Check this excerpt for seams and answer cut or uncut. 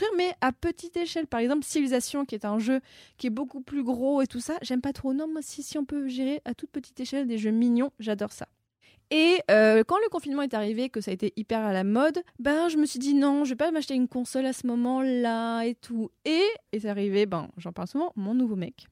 cut